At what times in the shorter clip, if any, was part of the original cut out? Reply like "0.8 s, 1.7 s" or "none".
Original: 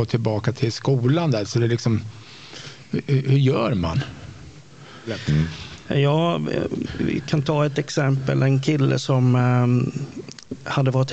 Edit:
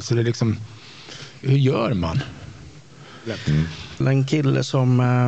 1.4 s, 4.0 s